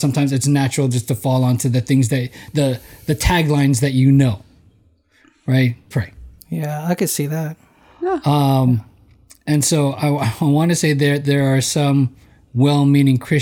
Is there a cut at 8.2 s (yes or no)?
no